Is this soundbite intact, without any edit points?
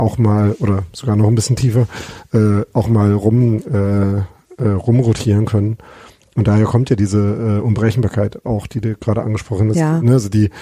yes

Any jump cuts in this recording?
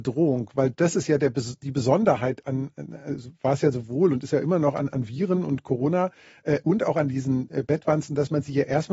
no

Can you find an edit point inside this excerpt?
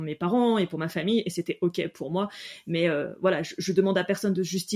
no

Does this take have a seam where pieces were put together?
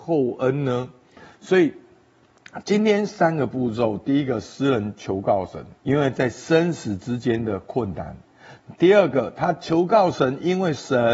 yes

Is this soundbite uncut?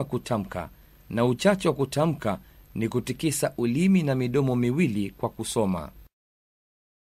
yes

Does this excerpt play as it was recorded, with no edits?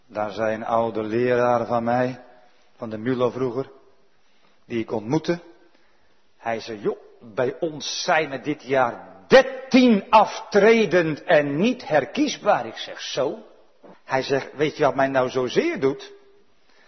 no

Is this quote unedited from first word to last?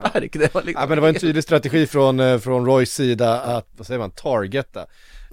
no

